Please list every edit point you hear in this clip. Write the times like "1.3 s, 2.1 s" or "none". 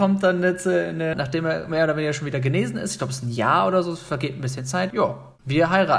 1.1 s, 4.9 s